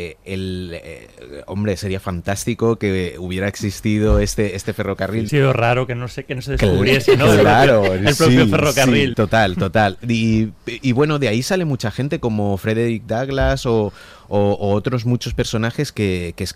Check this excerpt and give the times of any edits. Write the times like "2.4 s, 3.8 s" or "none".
5.3 s, 9.1 s